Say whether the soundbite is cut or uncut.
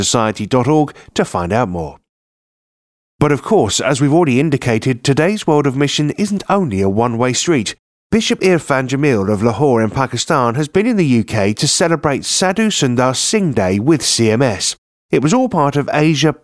uncut